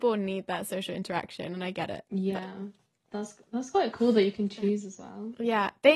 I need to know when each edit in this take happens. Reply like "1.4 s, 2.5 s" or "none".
none